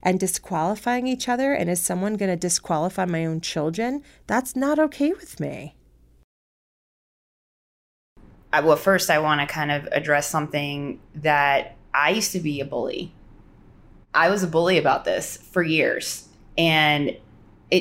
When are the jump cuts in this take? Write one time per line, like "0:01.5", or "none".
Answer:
none